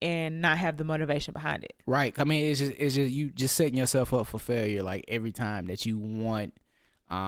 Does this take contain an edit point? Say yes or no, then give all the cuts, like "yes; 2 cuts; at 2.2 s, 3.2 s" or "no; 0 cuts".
no; 0 cuts